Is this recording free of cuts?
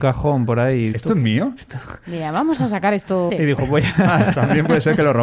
no; 2 cuts; at 0.9 s, 3.3 s

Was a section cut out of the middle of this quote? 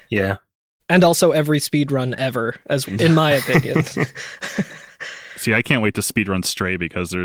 yes; 1 cut; at 2.9 s

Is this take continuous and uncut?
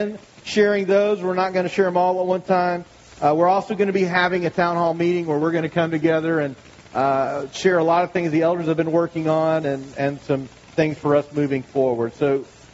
yes; 0 cuts

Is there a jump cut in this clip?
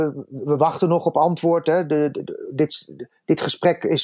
no; 0 cuts

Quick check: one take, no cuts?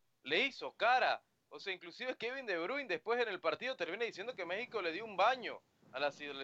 yes; 0 cuts

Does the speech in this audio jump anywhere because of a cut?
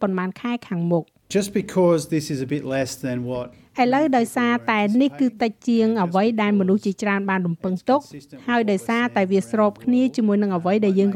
yes; 1 cut; at 1.3 s

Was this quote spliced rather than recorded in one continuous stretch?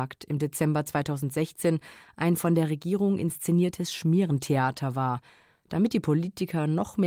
no; 0 cuts

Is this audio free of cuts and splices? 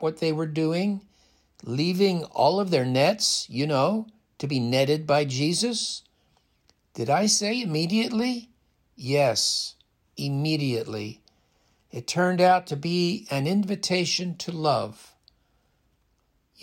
yes; 0 cuts

